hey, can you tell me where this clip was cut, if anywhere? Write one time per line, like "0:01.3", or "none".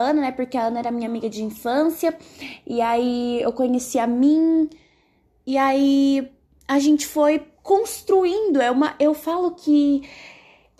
none